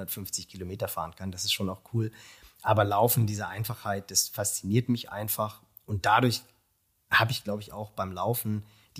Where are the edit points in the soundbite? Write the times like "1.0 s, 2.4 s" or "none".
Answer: none